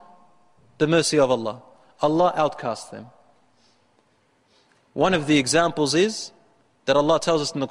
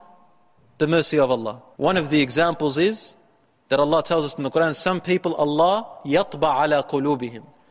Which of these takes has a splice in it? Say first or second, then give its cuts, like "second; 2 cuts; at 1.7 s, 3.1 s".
second; 1 cut; at 1.7 s